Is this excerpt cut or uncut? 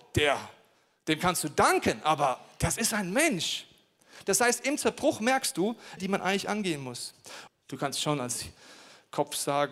cut